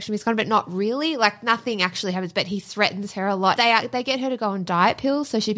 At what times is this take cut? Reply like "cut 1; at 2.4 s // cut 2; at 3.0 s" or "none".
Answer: cut 1; at 3.6 s